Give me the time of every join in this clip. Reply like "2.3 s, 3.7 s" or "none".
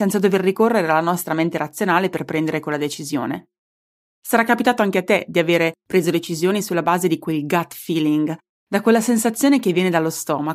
4.0 s, 8.5 s

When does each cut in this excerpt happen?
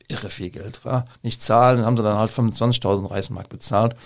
1.1 s

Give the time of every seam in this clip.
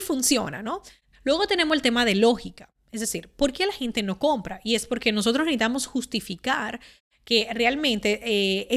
1.1 s

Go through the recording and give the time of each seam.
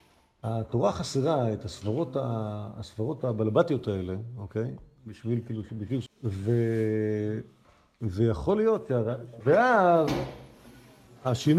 6.1 s, 9.4 s

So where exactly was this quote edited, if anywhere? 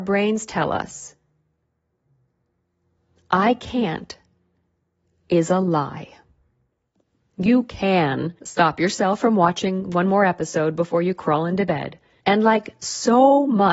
8.4 s, 12.2 s

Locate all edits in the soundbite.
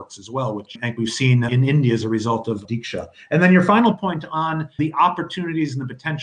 none

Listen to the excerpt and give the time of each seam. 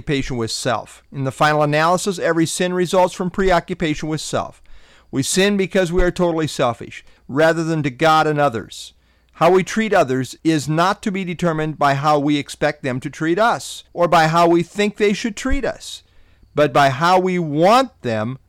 7.2 s, 10.4 s, 13.9 s

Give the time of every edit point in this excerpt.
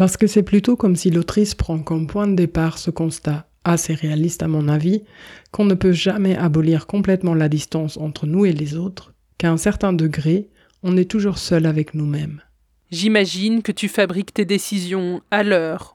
12.8 s

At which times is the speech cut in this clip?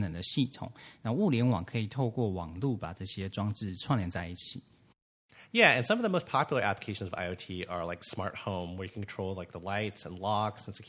none

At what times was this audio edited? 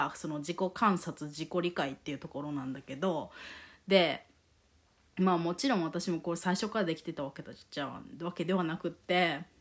none

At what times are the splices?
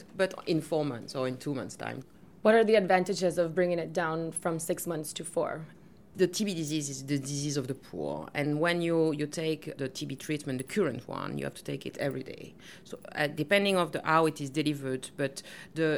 9.8 s

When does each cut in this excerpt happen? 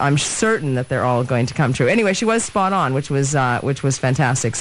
none

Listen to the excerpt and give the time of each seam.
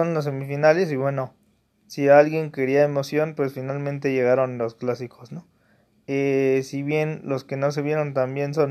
6.0 s

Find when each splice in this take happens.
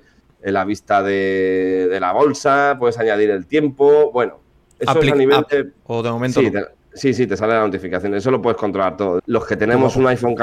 5.8 s, 9.2 s

